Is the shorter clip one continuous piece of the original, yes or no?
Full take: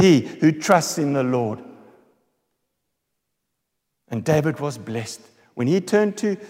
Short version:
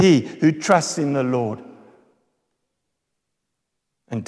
yes